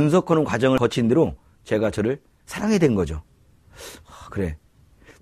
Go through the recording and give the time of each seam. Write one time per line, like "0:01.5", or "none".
none